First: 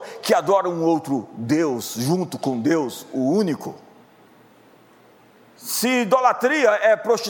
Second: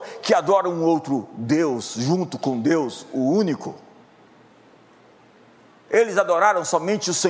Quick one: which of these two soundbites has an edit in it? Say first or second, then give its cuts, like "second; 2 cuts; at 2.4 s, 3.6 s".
first; 1 cut; at 5.6 s